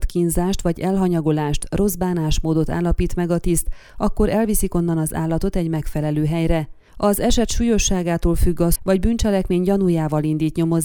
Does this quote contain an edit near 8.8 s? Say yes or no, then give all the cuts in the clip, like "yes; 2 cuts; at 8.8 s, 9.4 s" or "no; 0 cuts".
yes; 1 cut; at 8.8 s